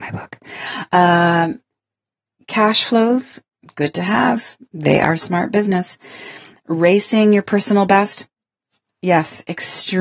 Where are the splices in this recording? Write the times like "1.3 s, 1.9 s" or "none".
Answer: none